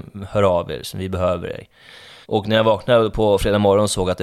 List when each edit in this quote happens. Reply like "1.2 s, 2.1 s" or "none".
2.2 s

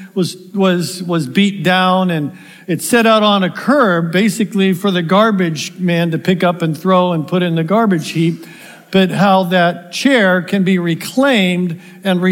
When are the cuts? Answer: none

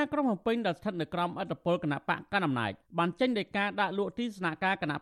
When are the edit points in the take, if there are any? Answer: none

